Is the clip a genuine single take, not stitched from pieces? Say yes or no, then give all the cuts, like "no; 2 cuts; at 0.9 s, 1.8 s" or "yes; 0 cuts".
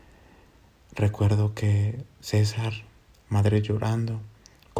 no; 1 cut; at 3.1 s